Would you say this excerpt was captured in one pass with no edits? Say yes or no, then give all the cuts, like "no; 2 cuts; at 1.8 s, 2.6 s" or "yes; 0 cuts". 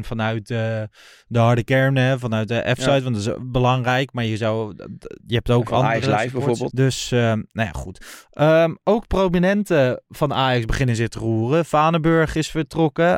no; 1 cut; at 6.7 s